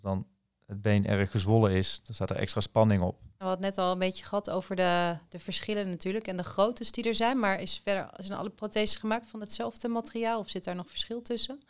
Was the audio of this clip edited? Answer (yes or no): yes